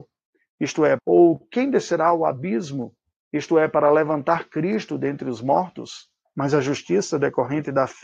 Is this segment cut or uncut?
cut